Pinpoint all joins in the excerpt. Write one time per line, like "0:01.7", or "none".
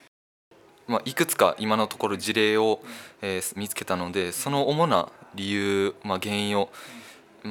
0:03.6